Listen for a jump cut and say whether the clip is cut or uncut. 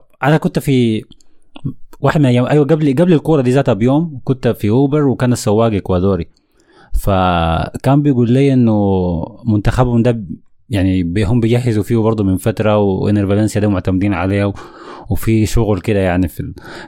uncut